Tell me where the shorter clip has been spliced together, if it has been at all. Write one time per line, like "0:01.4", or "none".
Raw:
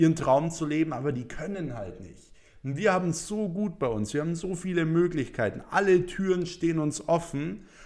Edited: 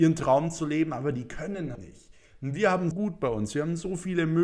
0:01.8
0:02.9